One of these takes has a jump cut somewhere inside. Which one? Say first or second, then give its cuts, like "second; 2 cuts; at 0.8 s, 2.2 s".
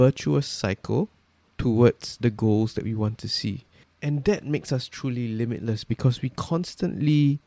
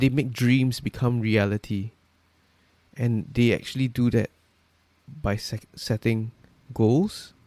first; 1 cut; at 3.8 s